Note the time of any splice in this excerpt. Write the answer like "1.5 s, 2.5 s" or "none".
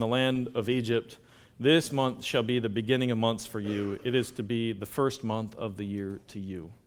none